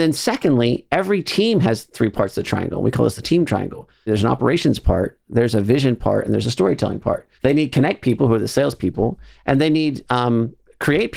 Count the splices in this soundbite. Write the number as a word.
one